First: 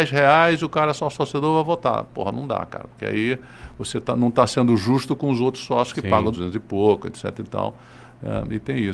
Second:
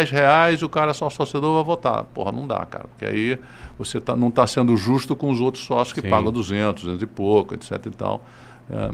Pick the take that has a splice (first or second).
first